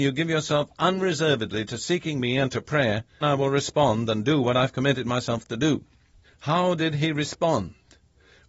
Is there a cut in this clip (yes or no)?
yes